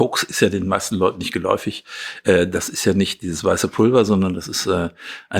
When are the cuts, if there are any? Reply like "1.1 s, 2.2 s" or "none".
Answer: none

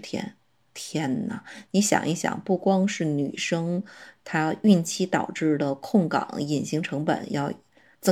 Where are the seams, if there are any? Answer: none

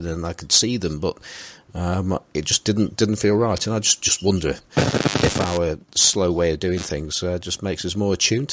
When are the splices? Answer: none

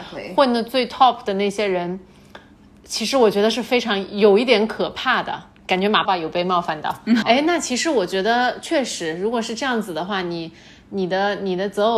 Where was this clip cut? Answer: 6.1 s, 7.2 s

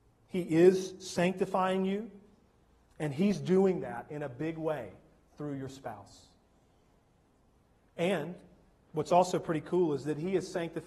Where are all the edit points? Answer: none

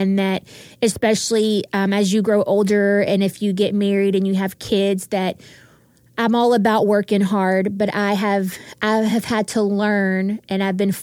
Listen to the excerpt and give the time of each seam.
none

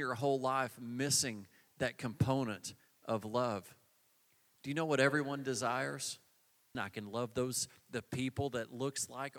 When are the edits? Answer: 6.7 s

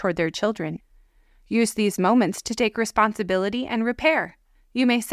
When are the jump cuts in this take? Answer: none

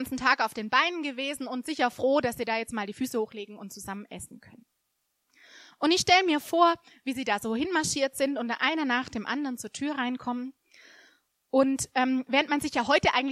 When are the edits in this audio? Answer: none

